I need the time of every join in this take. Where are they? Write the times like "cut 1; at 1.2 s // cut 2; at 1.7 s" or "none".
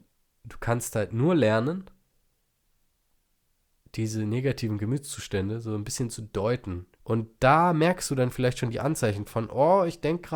cut 1; at 6.9 s